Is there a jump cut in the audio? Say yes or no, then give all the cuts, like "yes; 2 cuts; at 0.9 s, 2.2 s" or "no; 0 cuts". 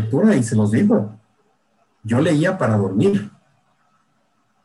no; 0 cuts